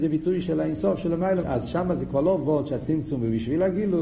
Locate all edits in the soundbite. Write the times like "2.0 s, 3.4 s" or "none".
1.4 s